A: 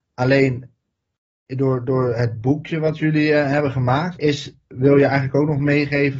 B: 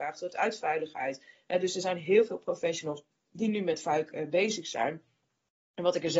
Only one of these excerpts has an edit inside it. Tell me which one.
A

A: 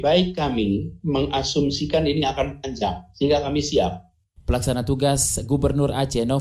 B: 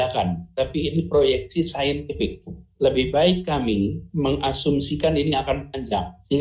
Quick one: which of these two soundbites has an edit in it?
A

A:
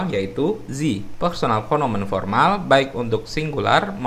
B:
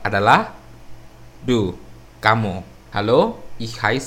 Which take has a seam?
B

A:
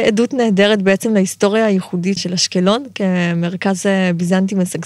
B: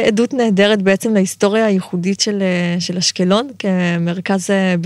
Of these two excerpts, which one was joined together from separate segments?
A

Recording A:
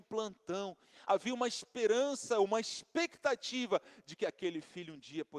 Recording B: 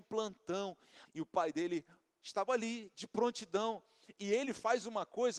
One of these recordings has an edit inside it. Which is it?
B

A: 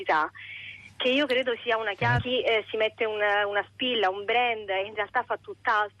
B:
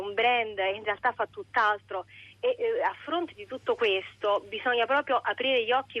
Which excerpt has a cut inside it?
A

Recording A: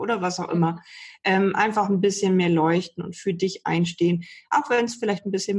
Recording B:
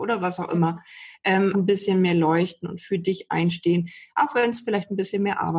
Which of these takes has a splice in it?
B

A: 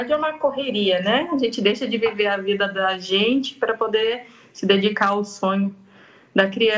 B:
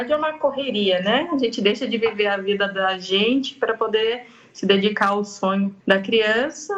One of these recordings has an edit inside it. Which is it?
B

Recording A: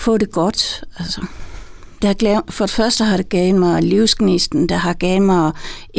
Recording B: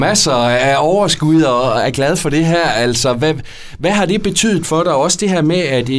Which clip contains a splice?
A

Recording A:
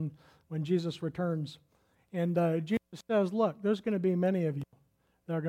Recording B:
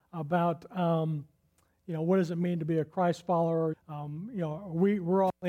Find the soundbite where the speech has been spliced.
B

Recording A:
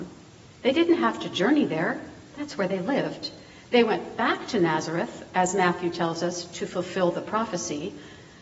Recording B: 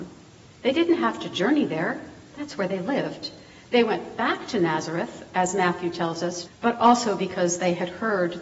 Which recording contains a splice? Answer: B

